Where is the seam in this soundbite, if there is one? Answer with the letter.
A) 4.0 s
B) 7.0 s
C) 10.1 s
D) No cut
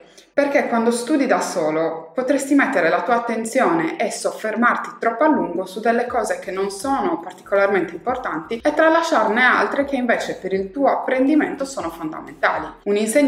D